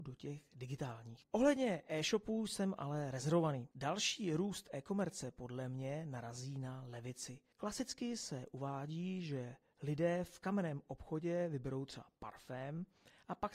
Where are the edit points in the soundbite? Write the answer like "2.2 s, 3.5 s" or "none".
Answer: 3.7 s, 7.5 s